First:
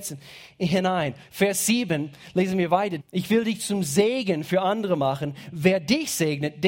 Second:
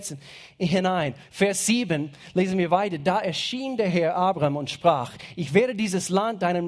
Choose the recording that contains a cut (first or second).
first